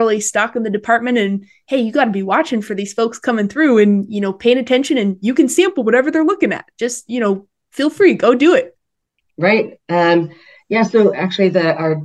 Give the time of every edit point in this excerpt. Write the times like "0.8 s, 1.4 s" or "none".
none